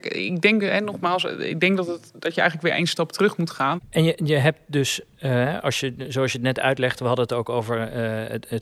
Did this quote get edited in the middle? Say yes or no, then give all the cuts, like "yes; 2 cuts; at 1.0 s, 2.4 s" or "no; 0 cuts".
yes; 1 cut; at 3.8 s